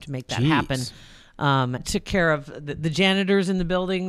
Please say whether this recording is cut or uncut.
cut